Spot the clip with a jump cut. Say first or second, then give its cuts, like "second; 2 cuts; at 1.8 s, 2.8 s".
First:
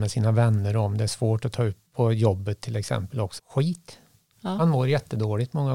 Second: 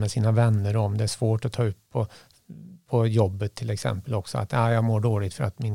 first; 2 cuts; at 1.9 s, 3.4 s